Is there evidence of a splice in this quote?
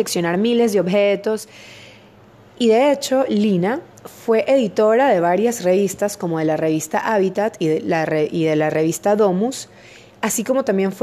no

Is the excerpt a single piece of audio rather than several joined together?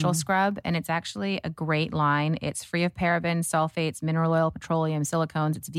yes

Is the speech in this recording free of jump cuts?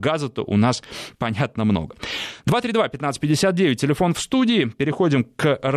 yes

